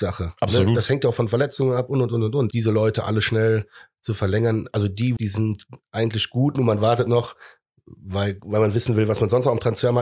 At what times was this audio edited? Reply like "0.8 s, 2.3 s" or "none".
2.5 s, 5.2 s